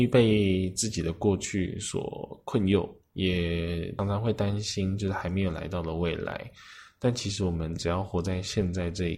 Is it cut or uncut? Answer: cut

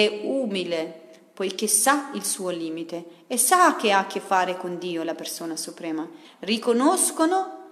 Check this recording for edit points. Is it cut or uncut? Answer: cut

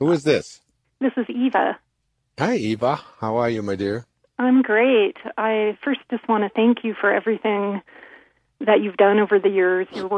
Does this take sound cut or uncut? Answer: uncut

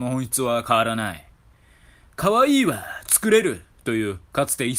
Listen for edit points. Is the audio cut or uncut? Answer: uncut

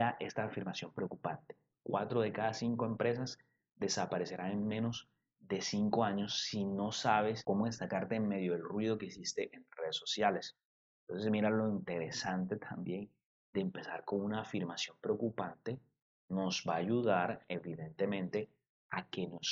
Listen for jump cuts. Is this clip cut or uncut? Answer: uncut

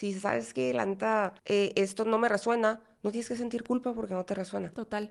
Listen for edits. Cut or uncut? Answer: cut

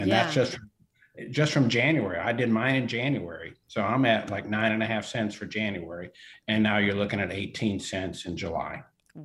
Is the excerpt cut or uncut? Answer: uncut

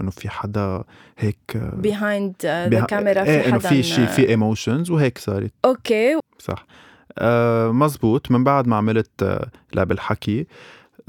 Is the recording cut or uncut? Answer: cut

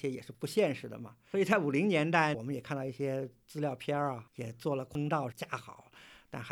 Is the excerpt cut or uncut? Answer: cut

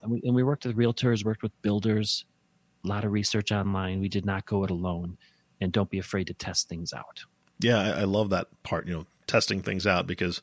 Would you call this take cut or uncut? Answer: uncut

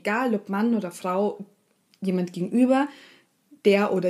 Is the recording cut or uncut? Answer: uncut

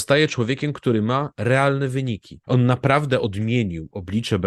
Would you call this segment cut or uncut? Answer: cut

